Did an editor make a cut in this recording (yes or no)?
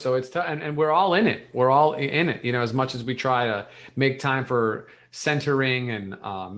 no